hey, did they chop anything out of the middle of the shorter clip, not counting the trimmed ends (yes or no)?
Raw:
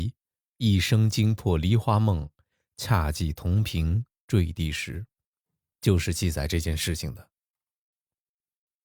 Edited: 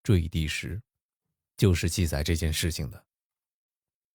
no